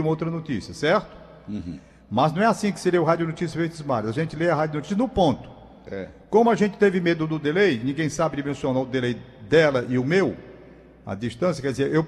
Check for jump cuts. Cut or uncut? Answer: uncut